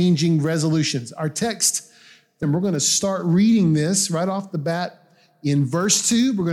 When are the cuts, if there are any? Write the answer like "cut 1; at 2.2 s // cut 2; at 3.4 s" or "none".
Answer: cut 1; at 2.4 s